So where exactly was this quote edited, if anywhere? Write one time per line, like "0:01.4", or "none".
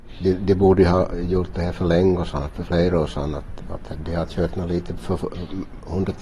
none